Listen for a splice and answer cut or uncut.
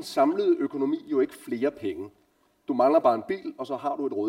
uncut